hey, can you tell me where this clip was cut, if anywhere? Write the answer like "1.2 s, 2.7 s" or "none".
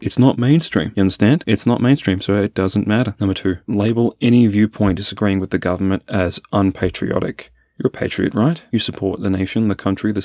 none